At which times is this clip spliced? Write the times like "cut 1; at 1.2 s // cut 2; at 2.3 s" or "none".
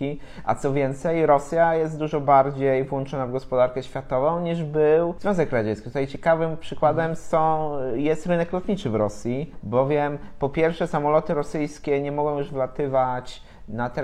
none